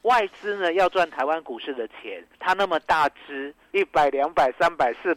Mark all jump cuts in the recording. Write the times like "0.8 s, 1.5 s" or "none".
2.3 s, 3.7 s